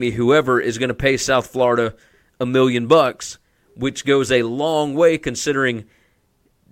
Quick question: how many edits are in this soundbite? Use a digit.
0